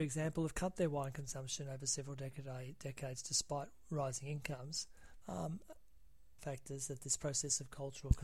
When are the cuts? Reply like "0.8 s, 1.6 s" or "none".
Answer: 5.2 s, 6.4 s